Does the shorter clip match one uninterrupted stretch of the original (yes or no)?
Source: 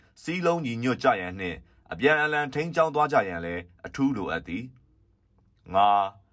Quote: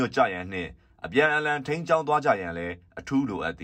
yes